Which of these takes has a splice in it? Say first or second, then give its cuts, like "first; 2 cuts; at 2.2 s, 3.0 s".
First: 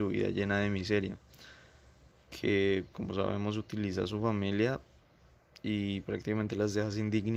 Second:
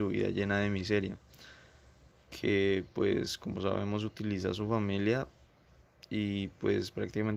first; 2 cuts; at 2.9 s, 6.0 s